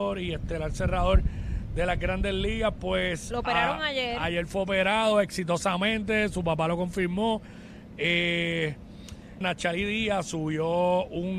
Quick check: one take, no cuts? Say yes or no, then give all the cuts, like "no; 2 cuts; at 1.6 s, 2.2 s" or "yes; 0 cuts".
no; 1 cut; at 9.4 s